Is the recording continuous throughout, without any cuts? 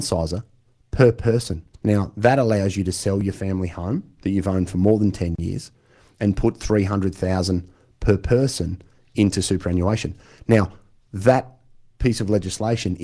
no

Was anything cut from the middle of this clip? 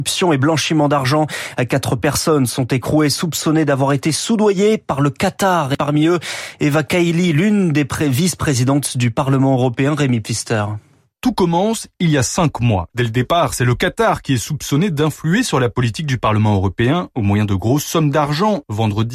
yes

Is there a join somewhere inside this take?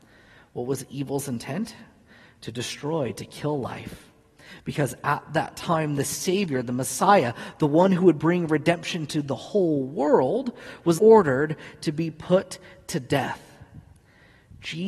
yes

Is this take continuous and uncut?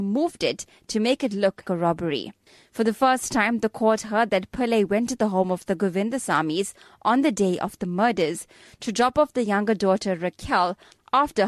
no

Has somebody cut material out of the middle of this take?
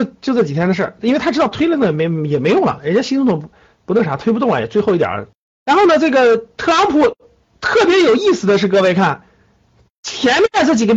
no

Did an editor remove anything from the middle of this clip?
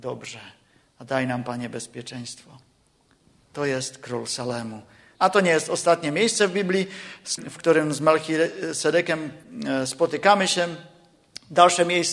yes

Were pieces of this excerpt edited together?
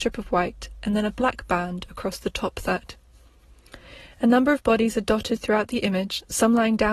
no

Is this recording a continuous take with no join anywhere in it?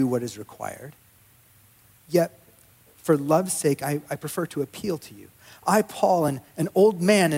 yes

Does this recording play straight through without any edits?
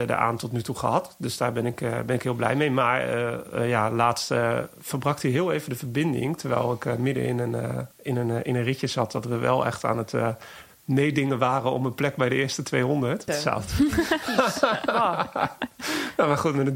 no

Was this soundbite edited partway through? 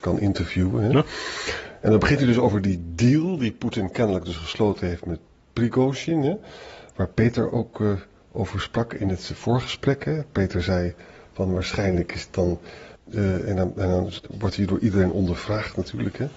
yes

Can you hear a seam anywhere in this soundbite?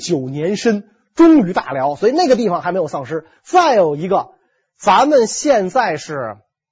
yes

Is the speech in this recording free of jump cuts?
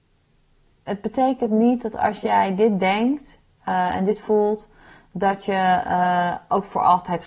yes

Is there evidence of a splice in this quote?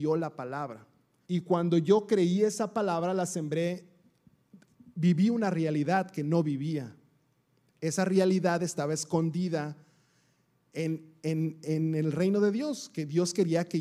yes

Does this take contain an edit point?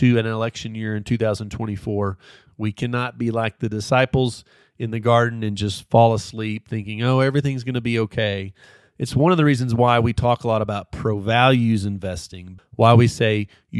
yes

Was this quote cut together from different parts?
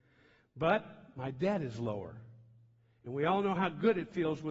no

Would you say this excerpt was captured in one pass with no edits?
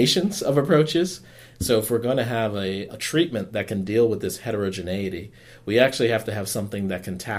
no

